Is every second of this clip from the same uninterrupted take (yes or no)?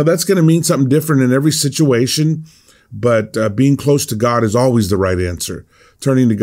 yes